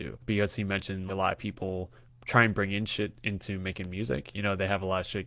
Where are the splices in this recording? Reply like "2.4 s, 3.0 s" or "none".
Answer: 1.1 s